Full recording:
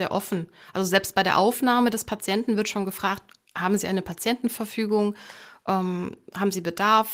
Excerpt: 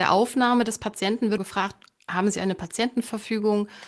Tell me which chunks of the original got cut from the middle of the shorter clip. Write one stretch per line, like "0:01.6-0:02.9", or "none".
0:02.6-0:02.8